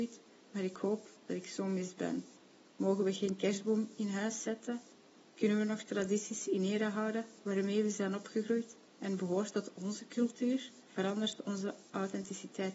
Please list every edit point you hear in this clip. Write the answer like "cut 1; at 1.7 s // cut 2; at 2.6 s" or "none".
cut 1; at 2.7 s // cut 2; at 10.8 s